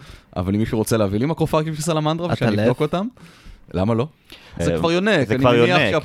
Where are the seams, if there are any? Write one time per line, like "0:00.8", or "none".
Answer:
0:04.6